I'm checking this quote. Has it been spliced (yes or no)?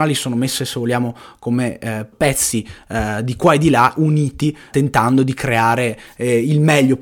yes